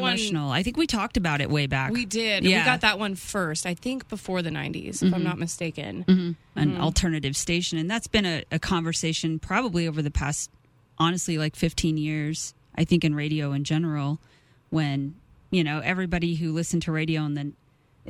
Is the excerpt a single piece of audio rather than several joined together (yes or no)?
no